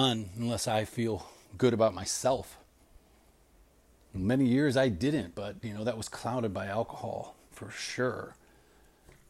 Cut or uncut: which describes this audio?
uncut